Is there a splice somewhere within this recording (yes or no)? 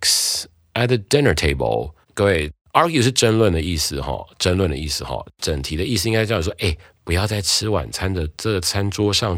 no